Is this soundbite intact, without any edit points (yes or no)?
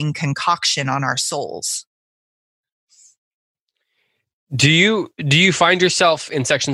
yes